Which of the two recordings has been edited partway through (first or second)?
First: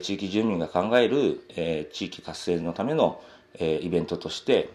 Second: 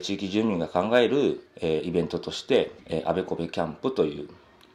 second